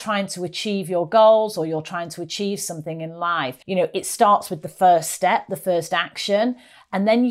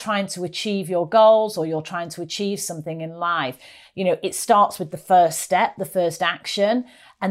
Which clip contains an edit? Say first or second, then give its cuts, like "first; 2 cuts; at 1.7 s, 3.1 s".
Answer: first; 1 cut; at 3.6 s